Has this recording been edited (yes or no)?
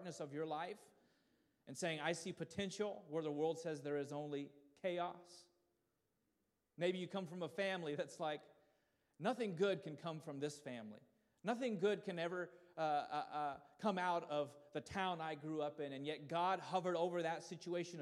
no